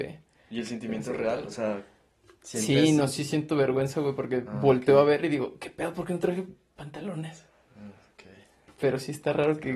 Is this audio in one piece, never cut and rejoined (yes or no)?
yes